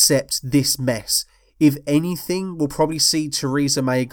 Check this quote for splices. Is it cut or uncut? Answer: uncut